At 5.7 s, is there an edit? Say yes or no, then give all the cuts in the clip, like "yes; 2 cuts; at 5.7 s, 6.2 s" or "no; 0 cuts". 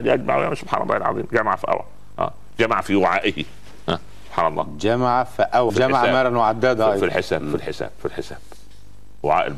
yes; 1 cut; at 5.7 s